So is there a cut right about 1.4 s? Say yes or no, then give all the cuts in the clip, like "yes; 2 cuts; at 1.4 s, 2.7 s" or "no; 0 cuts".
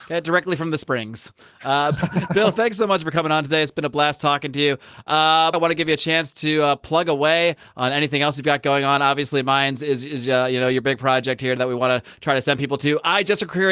no; 1 cut; at 5.5 s